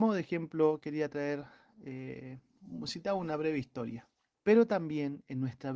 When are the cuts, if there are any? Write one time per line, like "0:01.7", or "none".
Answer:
0:04.3